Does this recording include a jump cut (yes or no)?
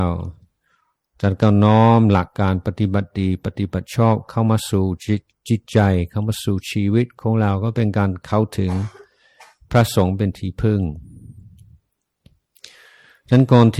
yes